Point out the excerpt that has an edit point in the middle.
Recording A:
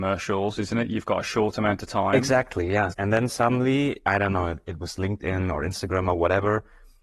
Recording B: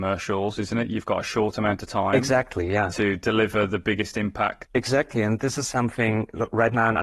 A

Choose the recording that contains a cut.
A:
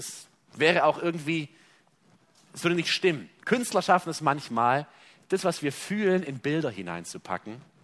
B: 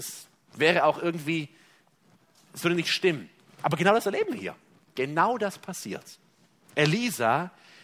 A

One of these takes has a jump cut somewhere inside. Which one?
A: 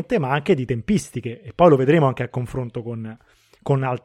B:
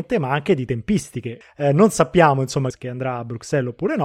B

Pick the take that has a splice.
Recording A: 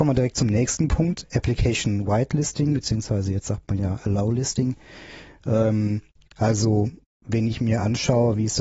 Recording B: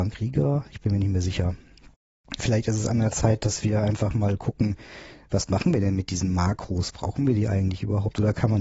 B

